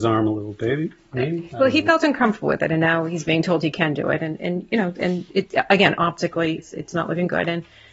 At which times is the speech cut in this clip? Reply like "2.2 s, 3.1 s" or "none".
6.6 s